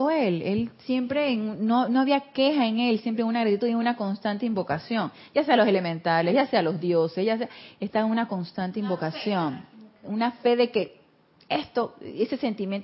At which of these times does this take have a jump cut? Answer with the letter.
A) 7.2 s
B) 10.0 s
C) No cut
C